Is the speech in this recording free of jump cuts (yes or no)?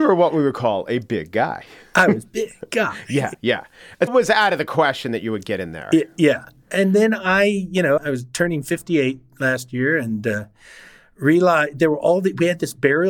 no